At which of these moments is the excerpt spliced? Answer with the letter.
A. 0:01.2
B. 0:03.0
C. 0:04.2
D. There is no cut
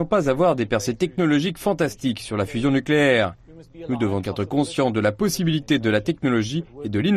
C